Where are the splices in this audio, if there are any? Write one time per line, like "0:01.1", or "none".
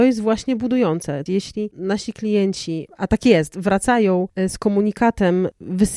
0:01.3